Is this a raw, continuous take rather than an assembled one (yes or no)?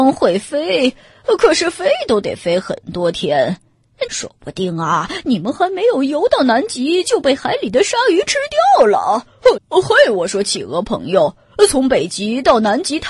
no